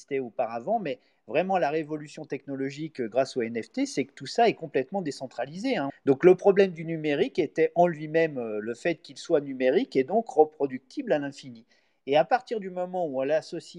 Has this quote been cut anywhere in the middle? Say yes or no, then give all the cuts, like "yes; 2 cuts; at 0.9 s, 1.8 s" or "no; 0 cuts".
yes; 1 cut; at 5.9 s